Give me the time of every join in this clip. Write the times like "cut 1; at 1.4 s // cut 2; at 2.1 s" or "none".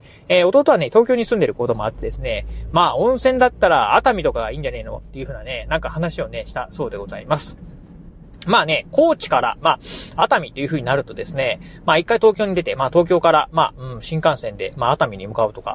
none